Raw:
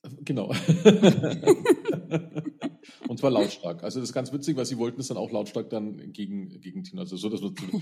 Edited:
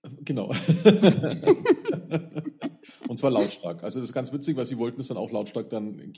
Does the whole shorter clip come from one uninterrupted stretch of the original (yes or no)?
yes